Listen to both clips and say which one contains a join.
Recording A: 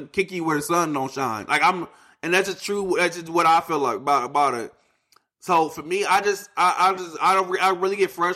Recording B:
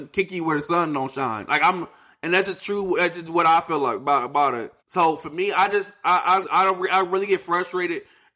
B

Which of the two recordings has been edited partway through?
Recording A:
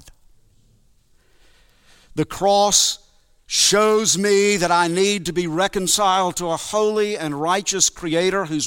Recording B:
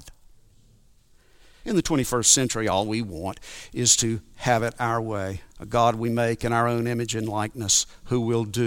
B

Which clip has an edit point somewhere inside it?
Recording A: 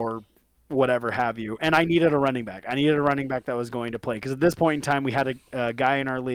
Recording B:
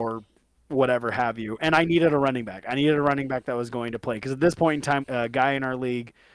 B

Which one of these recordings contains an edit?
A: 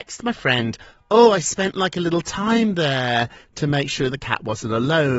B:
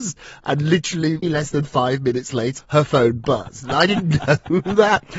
B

